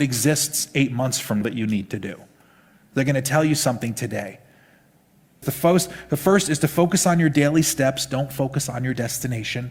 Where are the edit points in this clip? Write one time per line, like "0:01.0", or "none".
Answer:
0:01.4
0:05.4